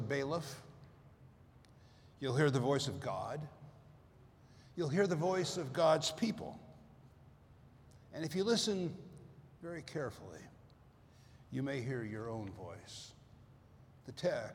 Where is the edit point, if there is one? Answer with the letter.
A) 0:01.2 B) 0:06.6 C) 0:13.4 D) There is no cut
D